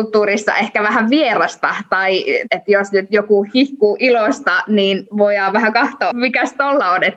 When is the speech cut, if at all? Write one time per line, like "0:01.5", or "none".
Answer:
0:06.1